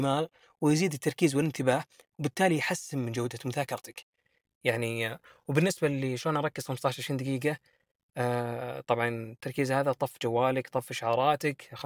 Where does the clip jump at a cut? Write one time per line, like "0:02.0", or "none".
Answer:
none